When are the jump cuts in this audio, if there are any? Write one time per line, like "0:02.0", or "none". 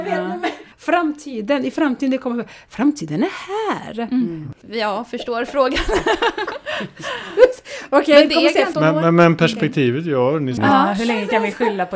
0:08.7
0:10.6